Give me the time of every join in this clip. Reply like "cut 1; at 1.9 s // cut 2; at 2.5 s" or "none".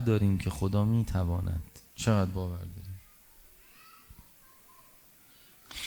cut 1; at 1.9 s